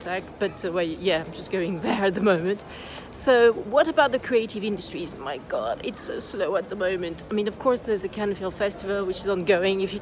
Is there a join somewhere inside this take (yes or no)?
no